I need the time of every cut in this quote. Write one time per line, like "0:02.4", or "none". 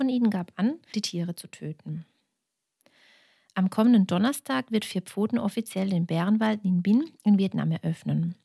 0:00.9